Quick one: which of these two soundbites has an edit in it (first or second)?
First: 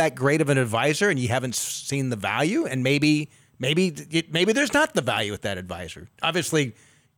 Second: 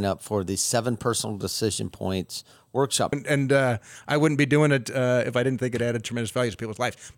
second